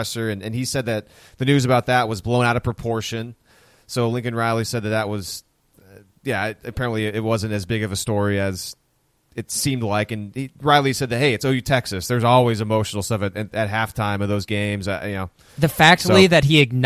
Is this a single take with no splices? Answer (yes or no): yes